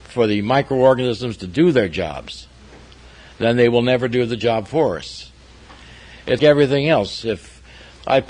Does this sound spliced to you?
yes; 1 cut; at 6.4 s

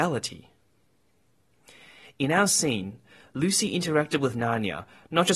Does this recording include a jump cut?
no; 0 cuts

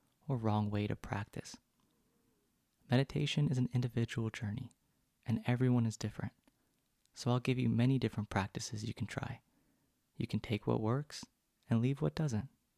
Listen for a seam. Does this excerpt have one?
no; 0 cuts

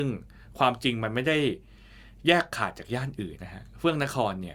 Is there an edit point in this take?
yes; 1 cut; at 3.4 s

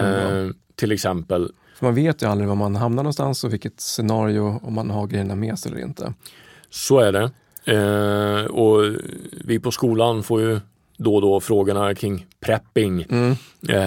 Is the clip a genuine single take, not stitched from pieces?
no; 2 cuts; at 1.6 s, 12.0 s

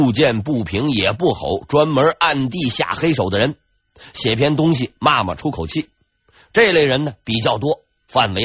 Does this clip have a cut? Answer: no; 0 cuts

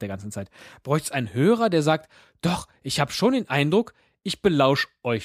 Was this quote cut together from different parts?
no; 0 cuts

